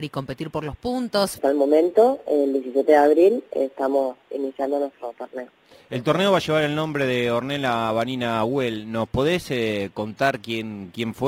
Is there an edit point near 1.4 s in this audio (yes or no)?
yes